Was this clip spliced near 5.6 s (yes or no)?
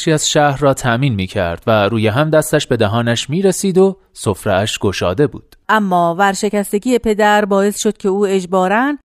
yes